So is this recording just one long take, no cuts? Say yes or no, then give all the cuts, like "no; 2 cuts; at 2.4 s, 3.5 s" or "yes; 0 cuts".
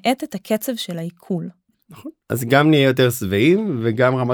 no; 1 cut; at 1.7 s